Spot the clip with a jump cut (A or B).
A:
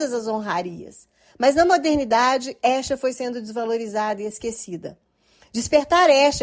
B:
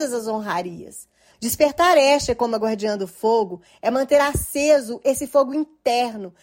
B